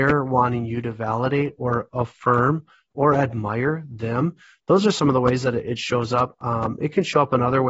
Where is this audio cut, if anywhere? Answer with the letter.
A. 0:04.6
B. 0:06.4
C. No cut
C